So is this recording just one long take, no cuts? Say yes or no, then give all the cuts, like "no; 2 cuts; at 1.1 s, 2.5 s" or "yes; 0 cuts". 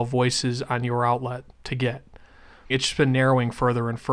no; 1 cut; at 2.7 s